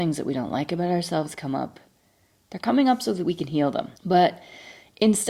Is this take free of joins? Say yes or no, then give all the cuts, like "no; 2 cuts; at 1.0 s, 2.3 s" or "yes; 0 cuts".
no; 1 cut; at 4.0 s